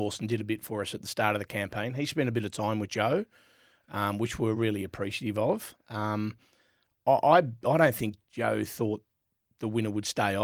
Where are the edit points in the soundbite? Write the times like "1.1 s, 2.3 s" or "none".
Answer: none